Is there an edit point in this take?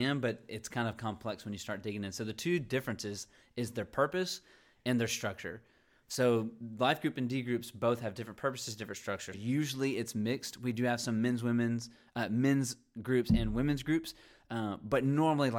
yes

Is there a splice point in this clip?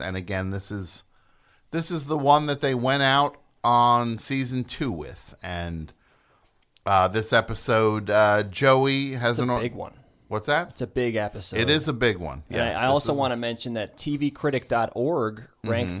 no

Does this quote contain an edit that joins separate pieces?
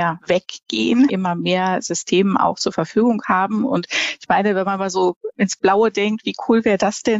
yes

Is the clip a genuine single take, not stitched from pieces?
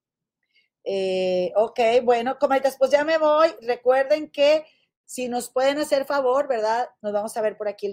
no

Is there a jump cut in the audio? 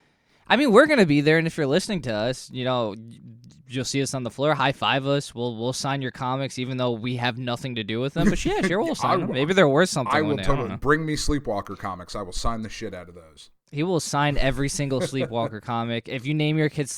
no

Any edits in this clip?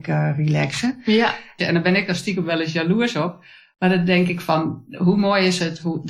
yes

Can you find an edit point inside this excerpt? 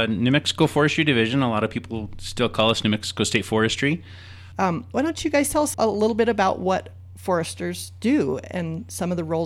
yes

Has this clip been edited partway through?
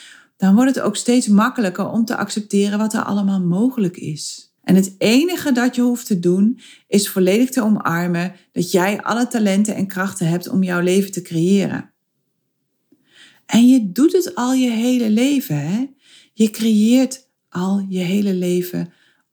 yes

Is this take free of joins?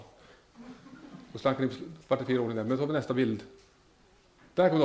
yes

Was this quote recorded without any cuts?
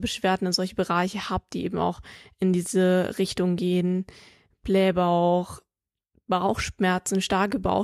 no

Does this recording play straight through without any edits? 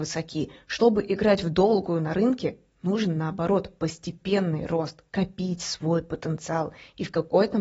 yes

